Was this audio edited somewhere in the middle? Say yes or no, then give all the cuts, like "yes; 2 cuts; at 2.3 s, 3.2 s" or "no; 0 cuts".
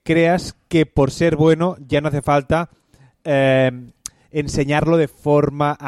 no; 0 cuts